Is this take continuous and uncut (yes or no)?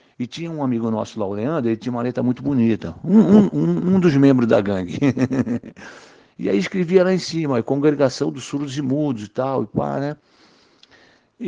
yes